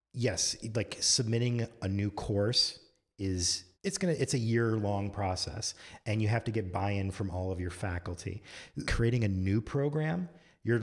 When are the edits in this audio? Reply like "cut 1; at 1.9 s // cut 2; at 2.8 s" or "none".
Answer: cut 1; at 3.7 s // cut 2; at 8.8 s